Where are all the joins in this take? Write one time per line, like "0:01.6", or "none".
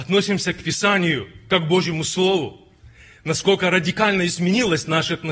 none